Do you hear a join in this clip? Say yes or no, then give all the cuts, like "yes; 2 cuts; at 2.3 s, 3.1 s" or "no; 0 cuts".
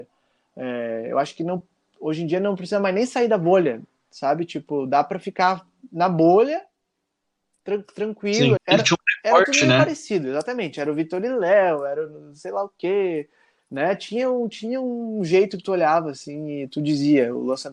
yes; 1 cut; at 8.6 s